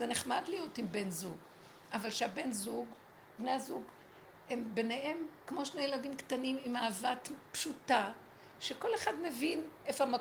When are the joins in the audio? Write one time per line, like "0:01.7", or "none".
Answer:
none